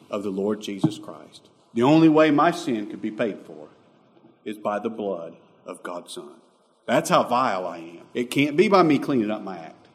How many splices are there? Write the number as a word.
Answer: two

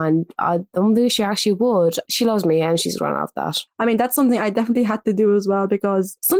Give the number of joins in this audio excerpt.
one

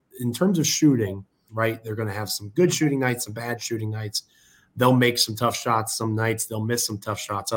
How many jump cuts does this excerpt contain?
one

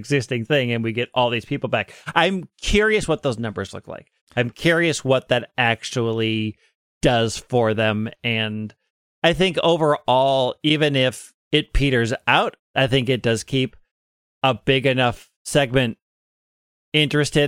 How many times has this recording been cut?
two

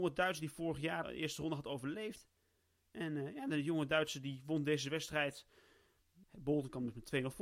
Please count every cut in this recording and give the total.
two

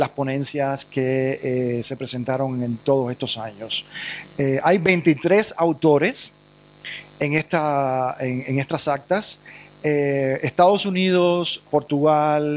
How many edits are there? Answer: one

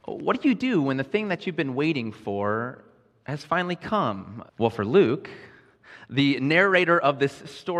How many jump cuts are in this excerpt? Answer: one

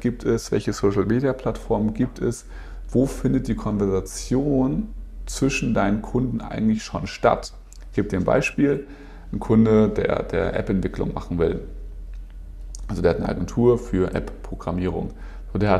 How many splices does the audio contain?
zero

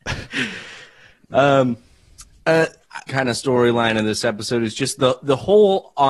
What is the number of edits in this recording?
one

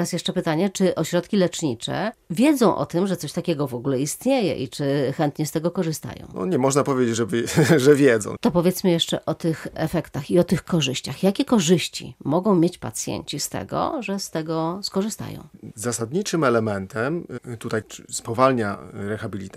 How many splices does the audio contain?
three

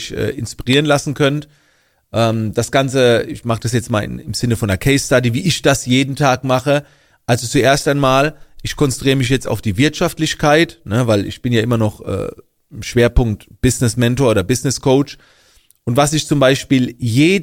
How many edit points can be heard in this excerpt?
zero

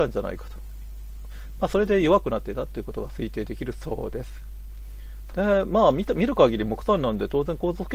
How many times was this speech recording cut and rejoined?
one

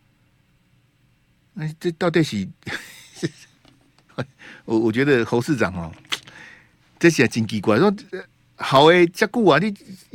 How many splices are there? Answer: one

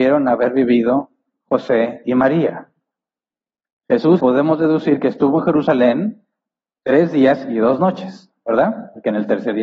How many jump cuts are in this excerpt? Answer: one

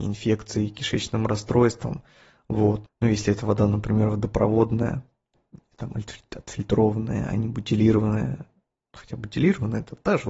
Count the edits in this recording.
one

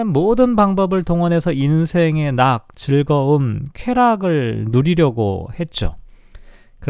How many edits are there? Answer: zero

